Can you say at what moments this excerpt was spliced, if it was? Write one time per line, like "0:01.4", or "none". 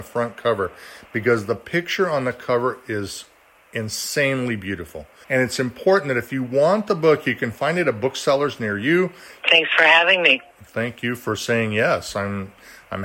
0:05.2
0:09.4